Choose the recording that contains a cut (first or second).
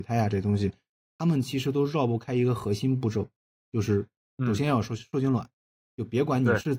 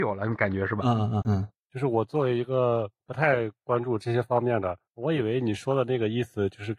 second